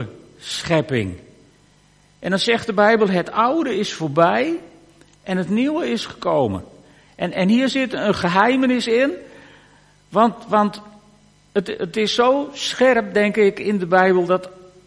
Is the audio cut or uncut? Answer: uncut